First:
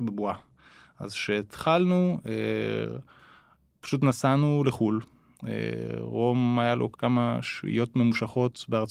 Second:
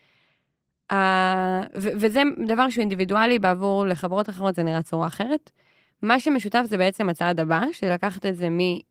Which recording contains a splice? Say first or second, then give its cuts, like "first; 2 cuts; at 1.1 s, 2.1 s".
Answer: first; 1 cut; at 6.9 s